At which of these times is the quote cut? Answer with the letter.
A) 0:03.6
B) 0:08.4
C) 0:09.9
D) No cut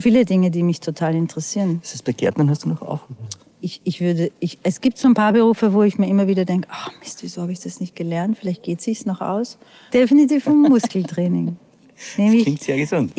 C